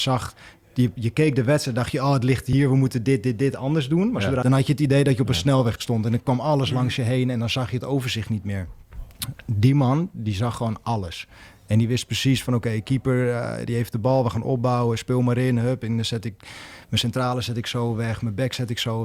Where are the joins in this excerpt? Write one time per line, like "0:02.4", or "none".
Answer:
0:04.4